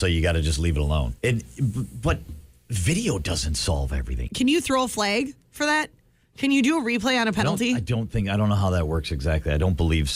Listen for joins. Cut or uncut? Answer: cut